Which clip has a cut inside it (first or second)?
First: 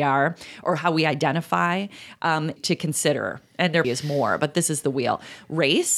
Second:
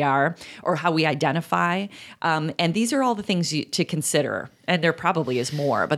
first